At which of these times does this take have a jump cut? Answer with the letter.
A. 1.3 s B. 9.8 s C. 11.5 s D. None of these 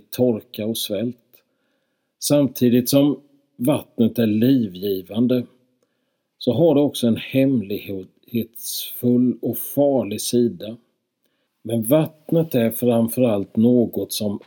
C